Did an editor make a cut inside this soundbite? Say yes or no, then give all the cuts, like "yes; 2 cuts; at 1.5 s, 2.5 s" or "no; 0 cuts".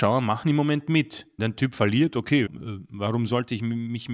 yes; 2 cuts; at 1.4 s, 2.5 s